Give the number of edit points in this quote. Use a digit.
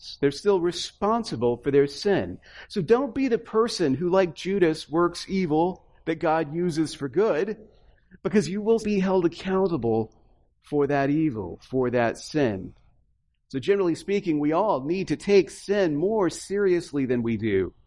1